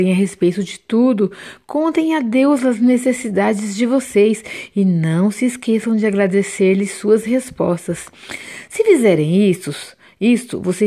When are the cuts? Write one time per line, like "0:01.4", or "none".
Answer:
none